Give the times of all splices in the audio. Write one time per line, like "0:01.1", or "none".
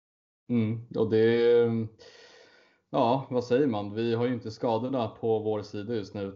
none